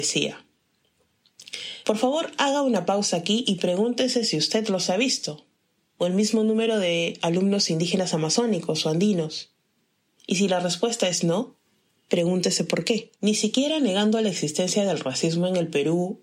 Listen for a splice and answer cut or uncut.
cut